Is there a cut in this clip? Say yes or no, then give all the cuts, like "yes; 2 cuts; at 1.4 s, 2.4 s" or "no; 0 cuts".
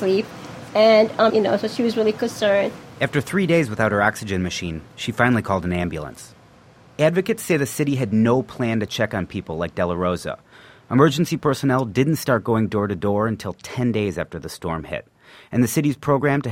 yes; 1 cut; at 1.3 s